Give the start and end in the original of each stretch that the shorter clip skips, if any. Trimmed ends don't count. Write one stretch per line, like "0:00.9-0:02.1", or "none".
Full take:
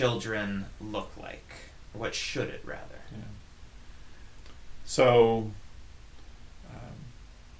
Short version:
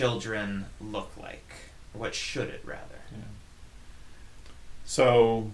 none